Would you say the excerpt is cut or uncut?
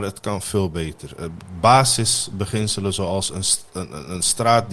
uncut